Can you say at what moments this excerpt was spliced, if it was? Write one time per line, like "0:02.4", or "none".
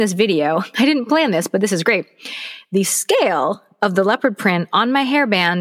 none